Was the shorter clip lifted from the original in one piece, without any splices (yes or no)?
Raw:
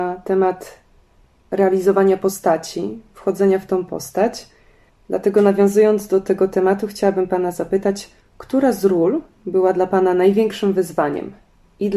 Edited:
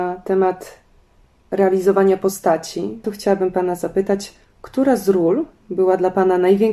no